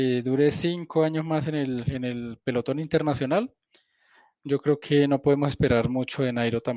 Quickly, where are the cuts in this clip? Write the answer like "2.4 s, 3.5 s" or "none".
none